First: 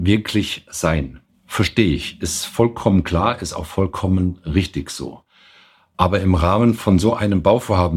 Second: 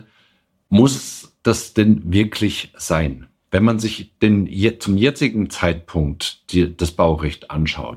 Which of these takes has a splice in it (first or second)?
first